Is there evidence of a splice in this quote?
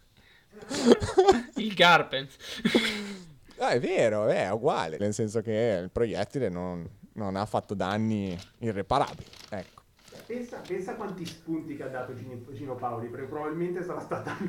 yes; 1 cut; at 5.0 s

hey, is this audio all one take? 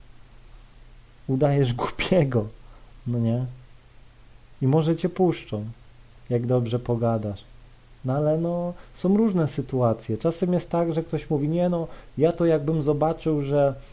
yes; 0 cuts

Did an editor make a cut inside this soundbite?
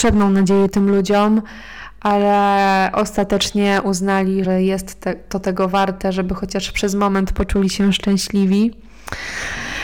yes; 1 cut; at 4.4 s

